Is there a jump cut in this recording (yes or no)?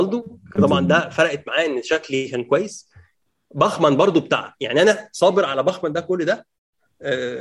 no